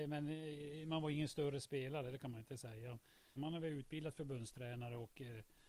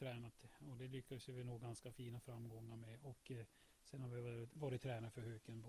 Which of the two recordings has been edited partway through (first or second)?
first